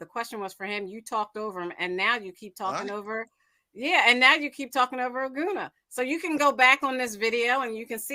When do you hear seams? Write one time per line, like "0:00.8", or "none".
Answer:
none